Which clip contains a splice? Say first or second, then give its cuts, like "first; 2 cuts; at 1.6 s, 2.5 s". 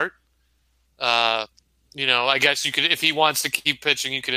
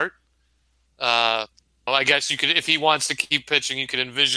second; 1 cut; at 1.9 s